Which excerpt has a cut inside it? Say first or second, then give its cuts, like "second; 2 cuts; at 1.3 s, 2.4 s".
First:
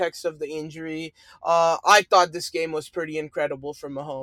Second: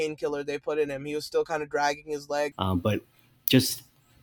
second; 1 cut; at 2.5 s